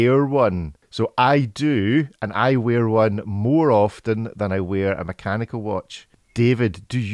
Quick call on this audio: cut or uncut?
uncut